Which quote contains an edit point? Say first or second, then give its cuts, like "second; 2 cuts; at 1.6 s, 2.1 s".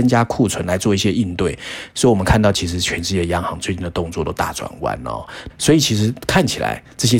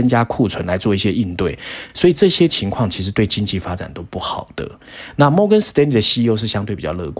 first; 2 cuts; at 1.9 s, 5.5 s